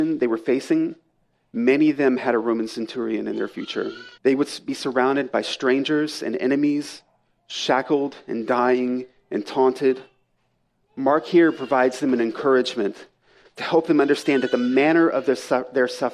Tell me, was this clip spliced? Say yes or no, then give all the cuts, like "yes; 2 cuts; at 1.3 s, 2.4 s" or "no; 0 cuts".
yes; 1 cut; at 4.2 s